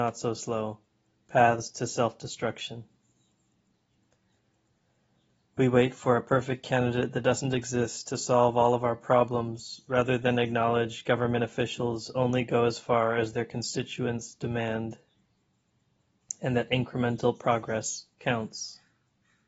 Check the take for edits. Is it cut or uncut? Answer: uncut